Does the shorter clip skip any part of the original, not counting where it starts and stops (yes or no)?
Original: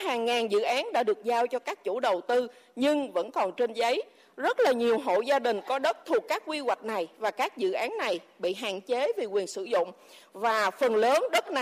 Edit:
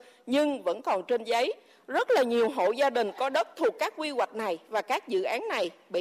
no